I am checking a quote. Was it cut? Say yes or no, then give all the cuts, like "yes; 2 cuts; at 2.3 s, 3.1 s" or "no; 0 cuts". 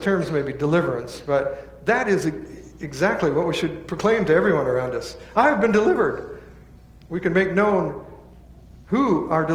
no; 0 cuts